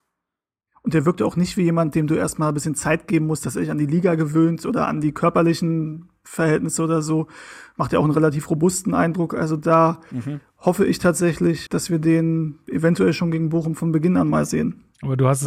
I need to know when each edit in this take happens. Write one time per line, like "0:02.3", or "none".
0:11.7